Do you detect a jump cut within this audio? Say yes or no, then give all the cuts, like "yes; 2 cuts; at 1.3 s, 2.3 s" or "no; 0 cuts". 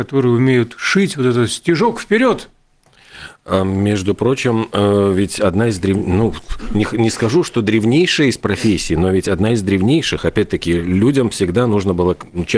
no; 0 cuts